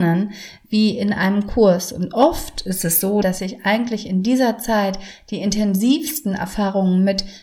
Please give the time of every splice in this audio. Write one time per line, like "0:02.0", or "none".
0:03.2